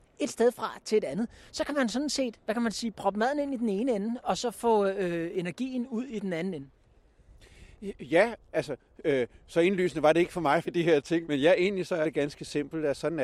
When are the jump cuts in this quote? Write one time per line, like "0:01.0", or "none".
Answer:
0:10.6